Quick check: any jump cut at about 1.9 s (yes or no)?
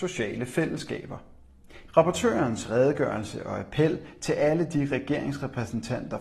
yes